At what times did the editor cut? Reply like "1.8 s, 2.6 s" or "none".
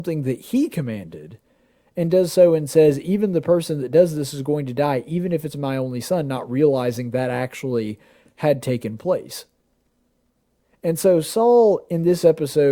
none